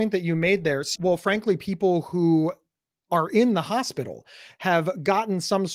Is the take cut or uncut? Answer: cut